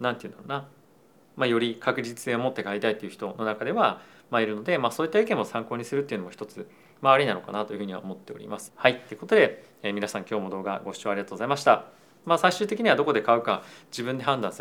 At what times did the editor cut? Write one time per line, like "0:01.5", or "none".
0:08.7
0:12.2